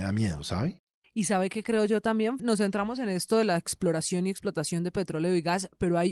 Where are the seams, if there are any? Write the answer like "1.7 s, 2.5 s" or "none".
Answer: 2.4 s